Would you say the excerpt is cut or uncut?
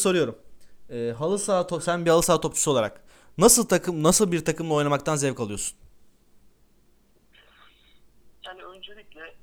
uncut